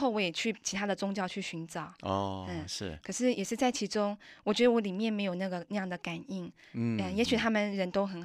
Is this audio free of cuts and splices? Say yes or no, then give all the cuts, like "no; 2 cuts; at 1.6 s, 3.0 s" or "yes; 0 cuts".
yes; 0 cuts